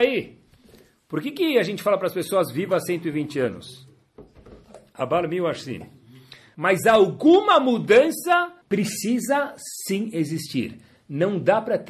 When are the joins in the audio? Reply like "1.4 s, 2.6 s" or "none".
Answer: 6.5 s, 8.6 s

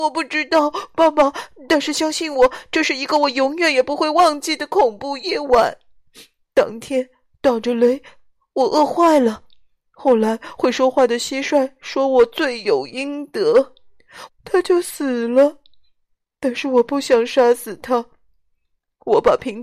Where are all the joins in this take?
14.3 s

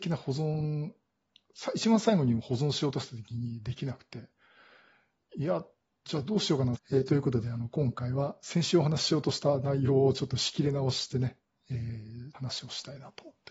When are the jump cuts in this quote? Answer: 6.8 s, 12.3 s

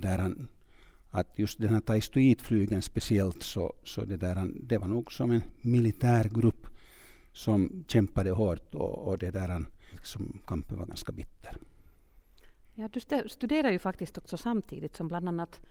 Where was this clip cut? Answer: 9.9 s

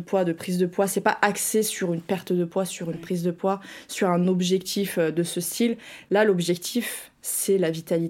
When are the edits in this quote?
none

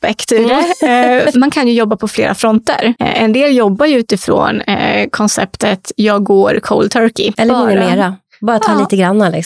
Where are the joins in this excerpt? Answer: 1.3 s, 7.3 s

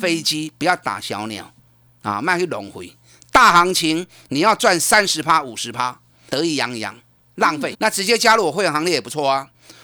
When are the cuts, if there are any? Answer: 6.3 s, 7.7 s

